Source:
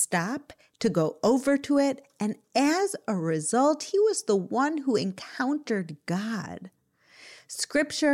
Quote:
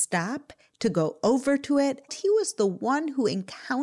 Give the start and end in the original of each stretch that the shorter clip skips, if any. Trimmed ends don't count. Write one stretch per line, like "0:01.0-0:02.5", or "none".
0:02.1-0:03.8